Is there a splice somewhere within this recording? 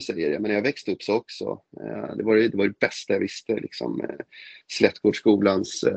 no; 0 cuts

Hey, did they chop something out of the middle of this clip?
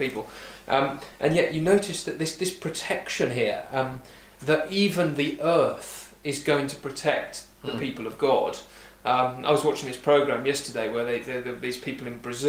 no; 0 cuts

